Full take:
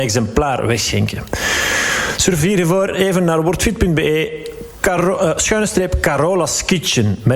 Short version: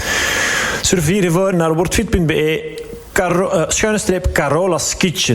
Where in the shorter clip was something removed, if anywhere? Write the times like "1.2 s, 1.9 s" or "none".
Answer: 1.5 s